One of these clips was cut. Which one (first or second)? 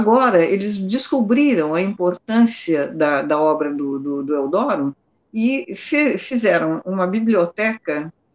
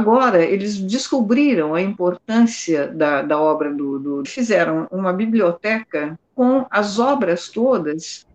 second